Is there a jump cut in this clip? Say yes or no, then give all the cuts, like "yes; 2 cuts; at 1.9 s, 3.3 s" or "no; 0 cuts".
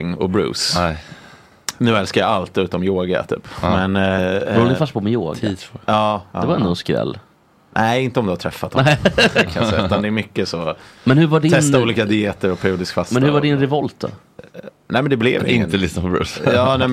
no; 0 cuts